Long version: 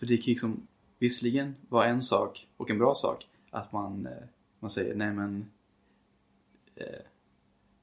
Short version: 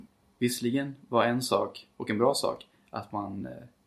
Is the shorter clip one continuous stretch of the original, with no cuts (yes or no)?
yes